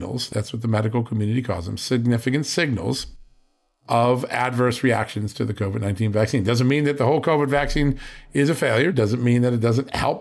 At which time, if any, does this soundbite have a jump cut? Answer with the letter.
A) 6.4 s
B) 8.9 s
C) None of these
C